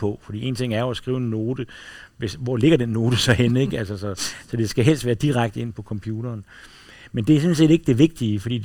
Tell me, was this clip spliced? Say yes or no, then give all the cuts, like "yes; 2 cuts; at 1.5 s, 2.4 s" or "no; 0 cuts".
no; 0 cuts